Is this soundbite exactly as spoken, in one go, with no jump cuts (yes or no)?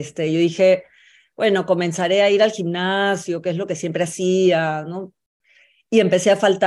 yes